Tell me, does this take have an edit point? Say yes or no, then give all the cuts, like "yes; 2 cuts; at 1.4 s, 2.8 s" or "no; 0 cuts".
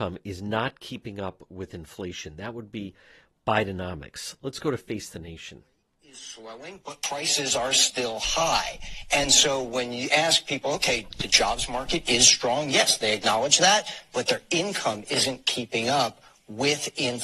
no; 0 cuts